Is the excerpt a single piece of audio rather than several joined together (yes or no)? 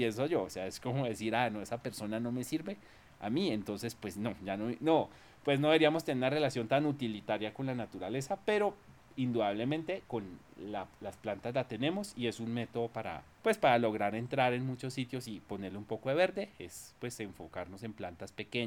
no